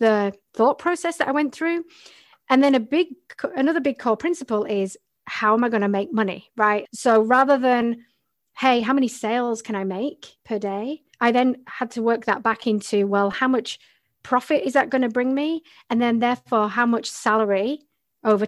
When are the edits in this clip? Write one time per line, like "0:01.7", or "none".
0:06.9
0:11.1

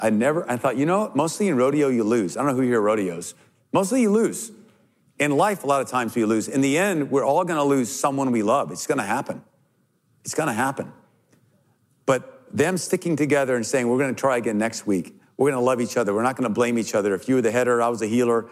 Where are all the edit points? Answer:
none

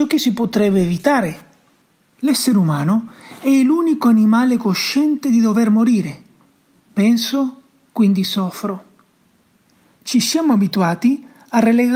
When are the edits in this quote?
none

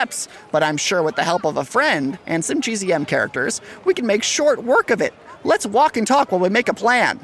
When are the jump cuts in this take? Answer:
none

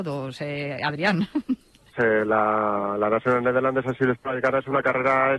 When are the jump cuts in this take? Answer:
0:01.9

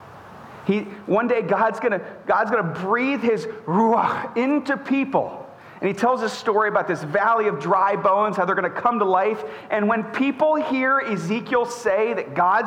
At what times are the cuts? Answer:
none

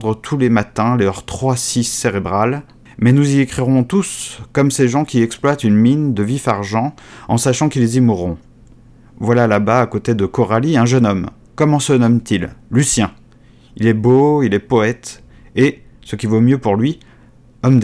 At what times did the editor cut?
none

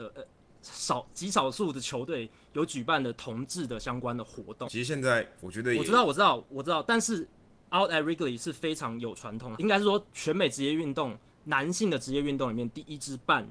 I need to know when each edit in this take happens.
0:04.6
0:09.5

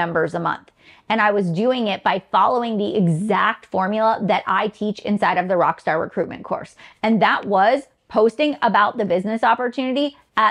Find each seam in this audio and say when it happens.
none

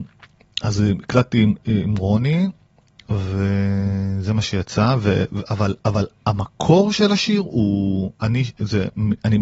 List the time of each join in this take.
none

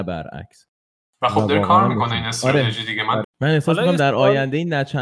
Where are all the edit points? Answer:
0:03.2

